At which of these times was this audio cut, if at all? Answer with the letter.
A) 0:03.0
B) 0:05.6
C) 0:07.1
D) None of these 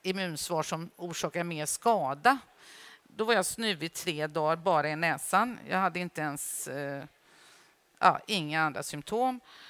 A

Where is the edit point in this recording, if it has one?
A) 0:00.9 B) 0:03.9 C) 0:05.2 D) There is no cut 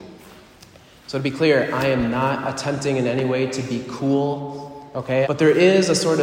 C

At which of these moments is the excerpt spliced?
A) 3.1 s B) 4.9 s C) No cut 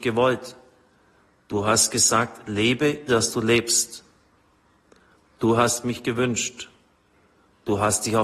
A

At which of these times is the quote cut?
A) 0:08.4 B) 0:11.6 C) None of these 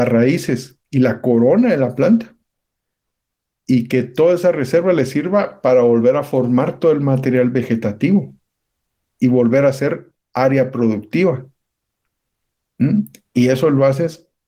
C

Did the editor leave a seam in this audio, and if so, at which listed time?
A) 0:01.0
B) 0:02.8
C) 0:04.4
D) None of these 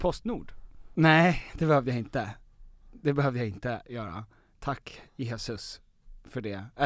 A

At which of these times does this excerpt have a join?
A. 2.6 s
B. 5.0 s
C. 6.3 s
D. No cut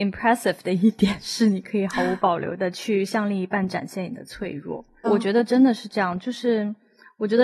B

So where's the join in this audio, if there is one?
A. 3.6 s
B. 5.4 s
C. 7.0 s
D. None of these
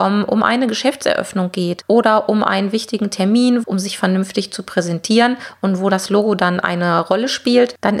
A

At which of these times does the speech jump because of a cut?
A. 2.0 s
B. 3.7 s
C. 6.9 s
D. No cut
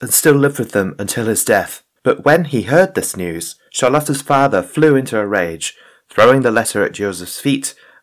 D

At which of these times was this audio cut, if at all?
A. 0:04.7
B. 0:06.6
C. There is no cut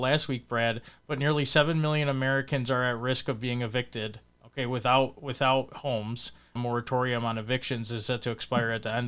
B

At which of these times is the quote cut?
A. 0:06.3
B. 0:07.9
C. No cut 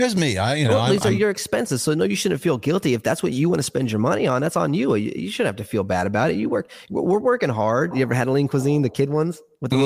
B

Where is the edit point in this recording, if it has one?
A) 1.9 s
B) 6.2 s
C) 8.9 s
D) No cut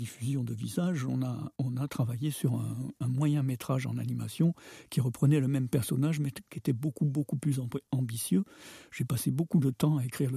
D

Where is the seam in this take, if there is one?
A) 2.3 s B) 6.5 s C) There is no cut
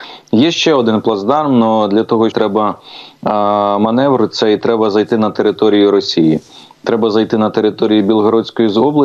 A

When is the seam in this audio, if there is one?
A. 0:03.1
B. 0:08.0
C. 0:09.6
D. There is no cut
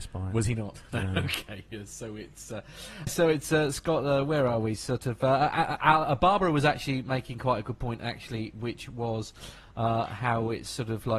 A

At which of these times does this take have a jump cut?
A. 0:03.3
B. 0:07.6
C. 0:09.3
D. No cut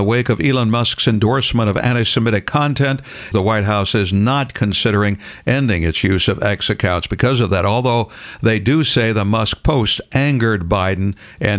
A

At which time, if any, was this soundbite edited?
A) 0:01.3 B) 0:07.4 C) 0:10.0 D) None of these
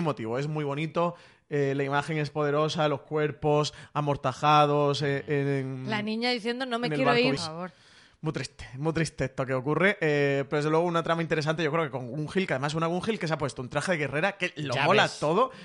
B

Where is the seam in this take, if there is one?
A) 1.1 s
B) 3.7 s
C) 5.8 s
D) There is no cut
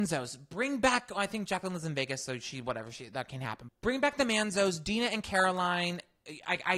B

